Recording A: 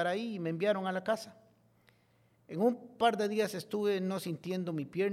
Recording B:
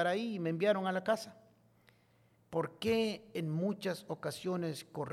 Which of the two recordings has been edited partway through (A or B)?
B